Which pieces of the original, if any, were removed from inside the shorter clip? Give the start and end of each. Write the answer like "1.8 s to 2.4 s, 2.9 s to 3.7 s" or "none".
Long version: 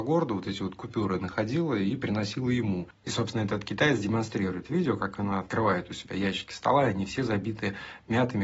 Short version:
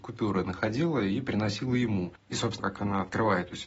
3.3 s to 5.0 s